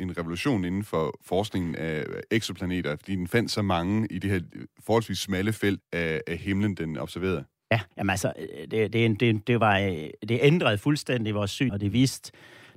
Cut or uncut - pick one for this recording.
cut